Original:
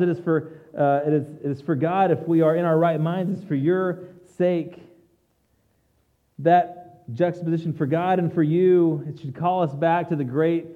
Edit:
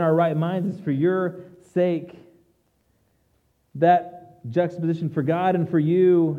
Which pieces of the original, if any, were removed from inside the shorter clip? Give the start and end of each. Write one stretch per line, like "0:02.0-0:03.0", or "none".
none